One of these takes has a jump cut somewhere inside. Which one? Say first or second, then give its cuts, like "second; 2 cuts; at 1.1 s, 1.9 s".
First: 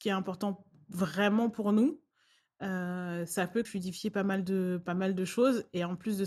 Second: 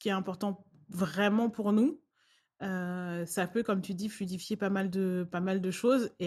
first; 1 cut; at 3.6 s